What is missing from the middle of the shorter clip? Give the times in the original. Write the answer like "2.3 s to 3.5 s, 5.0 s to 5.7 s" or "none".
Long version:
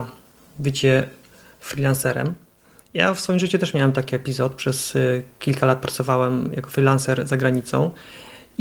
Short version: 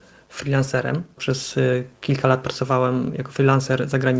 2.5 s to 4.6 s

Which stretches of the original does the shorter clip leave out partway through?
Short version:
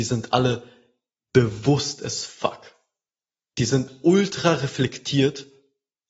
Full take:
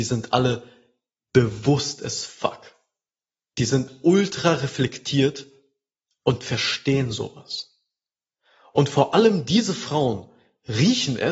none

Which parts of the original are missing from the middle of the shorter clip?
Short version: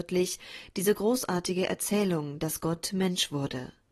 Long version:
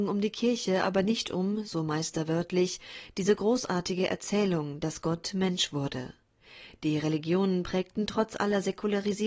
none

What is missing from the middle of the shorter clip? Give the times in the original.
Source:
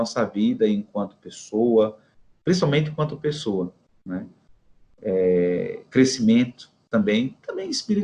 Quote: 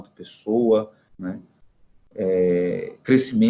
2.2 s to 4.0 s

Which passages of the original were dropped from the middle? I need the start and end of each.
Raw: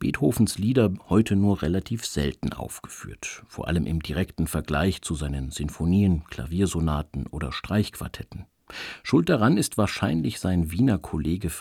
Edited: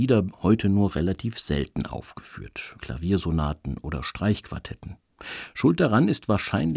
3.5 s to 6.3 s

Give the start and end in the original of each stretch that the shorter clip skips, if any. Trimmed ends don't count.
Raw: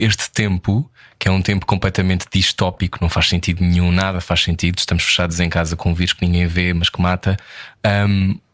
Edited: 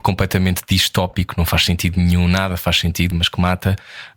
4.8 s to 6.7 s

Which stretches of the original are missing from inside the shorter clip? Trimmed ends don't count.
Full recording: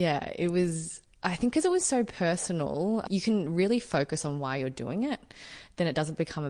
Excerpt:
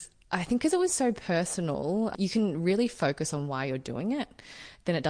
none

